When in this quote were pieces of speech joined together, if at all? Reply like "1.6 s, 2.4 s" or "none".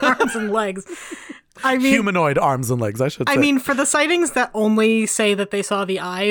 none